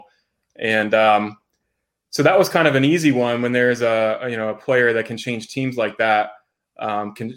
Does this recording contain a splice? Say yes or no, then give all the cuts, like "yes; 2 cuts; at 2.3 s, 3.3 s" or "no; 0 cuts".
no; 0 cuts